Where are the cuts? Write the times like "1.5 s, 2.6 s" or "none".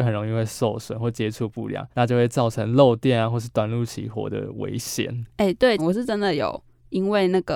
1.9 s, 5.8 s